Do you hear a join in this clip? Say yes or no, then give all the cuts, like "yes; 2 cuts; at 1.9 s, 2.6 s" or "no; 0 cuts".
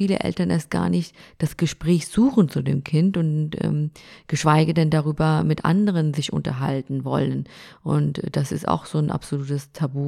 no; 0 cuts